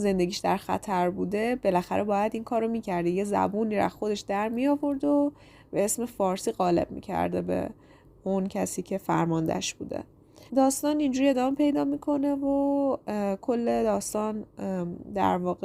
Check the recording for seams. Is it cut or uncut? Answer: cut